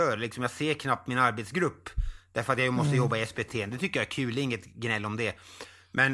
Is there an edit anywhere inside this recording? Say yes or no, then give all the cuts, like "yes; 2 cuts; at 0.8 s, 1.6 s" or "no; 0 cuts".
no; 0 cuts